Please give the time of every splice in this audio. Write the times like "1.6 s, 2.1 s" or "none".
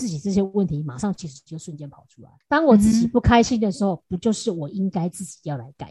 2.4 s